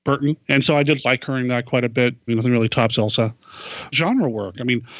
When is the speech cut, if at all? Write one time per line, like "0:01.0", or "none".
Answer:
0:02.3
0:03.9